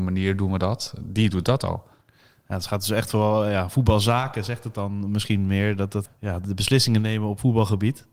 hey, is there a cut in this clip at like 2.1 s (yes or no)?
no